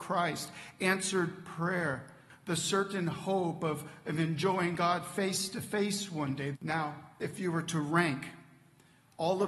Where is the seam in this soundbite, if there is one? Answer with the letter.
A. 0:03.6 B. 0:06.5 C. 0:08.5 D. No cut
B